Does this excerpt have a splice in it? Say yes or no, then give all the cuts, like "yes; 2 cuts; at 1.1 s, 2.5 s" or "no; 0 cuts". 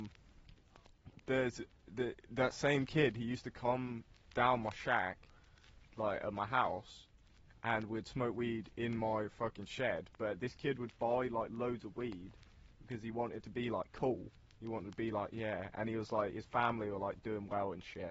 yes; 1 cut; at 1.2 s